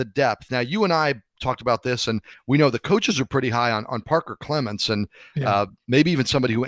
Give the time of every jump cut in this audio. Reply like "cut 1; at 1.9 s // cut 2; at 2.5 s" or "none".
none